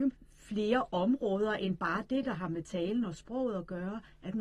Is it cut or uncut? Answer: uncut